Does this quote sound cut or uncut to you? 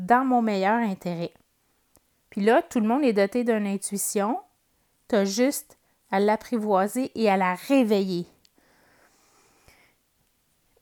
uncut